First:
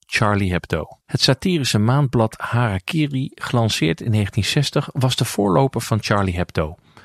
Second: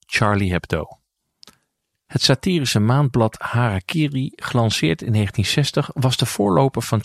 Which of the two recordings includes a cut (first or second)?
first